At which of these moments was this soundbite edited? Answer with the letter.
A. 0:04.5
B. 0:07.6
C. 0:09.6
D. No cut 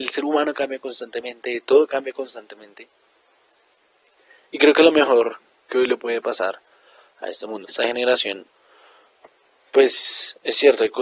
B